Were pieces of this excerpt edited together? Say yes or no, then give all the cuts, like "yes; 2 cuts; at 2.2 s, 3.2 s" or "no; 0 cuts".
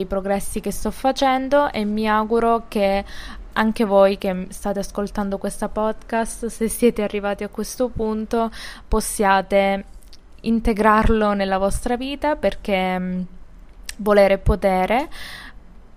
yes; 1 cut; at 3.5 s